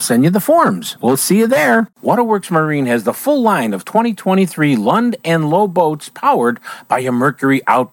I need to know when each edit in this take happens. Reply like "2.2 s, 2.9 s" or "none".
1.9 s